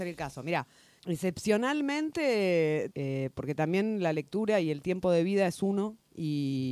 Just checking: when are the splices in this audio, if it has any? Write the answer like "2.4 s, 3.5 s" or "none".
1.0 s, 2.9 s